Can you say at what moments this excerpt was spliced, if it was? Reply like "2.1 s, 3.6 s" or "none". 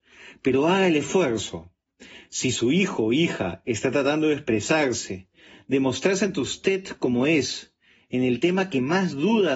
none